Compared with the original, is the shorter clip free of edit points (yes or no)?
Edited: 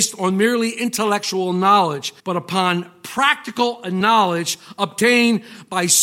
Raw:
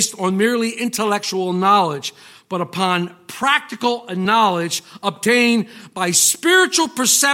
no